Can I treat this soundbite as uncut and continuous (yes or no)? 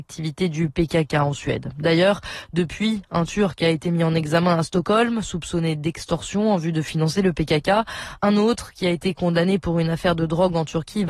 yes